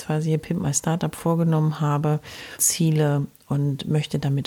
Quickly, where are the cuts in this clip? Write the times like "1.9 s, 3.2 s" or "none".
2.6 s